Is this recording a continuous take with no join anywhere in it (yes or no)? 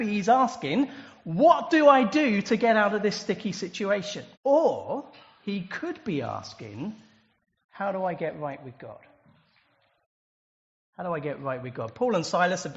no